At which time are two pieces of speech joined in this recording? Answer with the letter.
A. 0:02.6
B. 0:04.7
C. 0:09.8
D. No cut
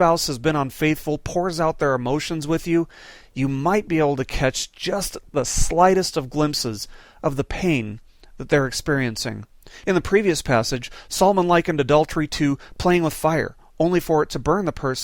D